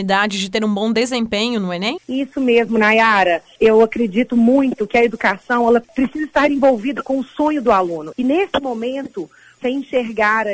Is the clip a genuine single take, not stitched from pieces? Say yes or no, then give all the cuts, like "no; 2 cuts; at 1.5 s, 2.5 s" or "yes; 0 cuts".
no; 2 cuts; at 8.1 s, 9.6 s